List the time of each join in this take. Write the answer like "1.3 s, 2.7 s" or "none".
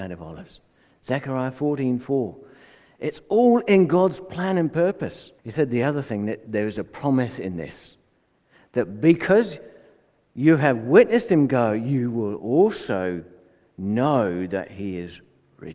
5.4 s